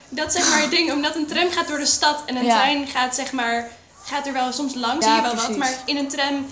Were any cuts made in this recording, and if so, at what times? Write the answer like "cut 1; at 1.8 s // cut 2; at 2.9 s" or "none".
cut 1; at 5.0 s